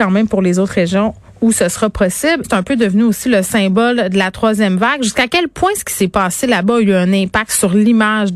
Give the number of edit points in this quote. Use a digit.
1